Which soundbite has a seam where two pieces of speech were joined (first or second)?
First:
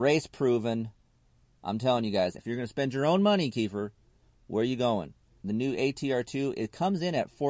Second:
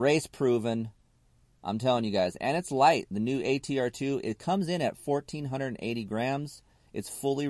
first